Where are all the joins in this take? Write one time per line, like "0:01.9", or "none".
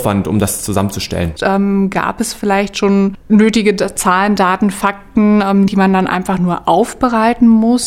0:01.4
0:05.7